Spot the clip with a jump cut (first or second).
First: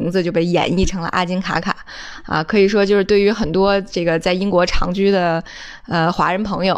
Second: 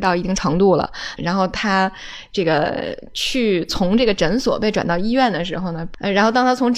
second